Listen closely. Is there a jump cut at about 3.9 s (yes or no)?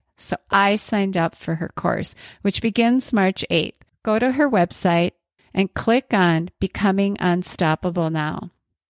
yes